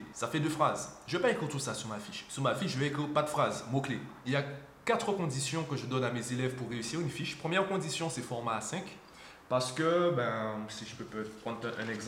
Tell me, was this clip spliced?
yes; 1 cut; at 4.2 s

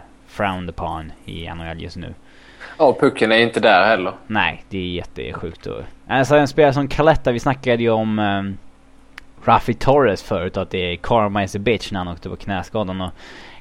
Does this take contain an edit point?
no; 0 cuts

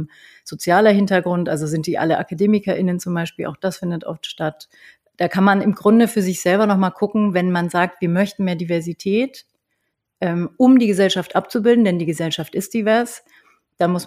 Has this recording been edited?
no; 0 cuts

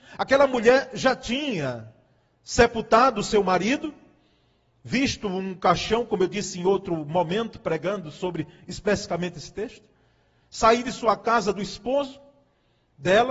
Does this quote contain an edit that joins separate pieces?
no; 0 cuts

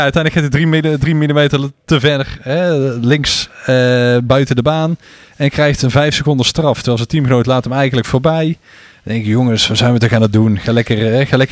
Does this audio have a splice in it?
no; 0 cuts

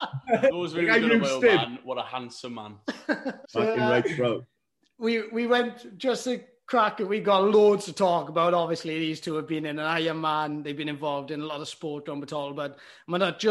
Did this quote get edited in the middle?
yes; 1 cut; at 3.4 s

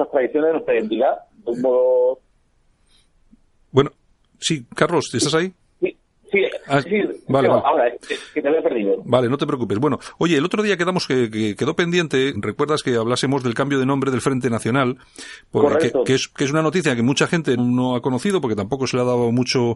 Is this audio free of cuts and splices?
no; 2 cuts; at 12.3 s, 17.6 s

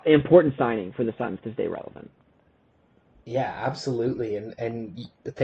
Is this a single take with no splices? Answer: yes; 0 cuts

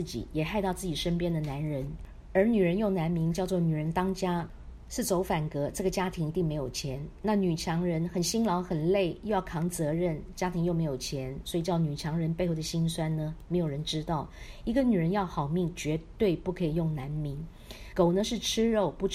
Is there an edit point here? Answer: yes; 1 cut; at 17.9 s

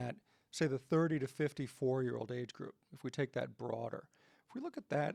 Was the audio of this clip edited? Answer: no; 0 cuts

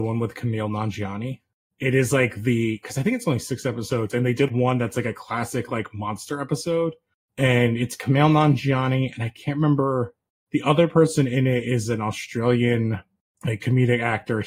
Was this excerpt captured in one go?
no; 1 cut; at 4.5 s

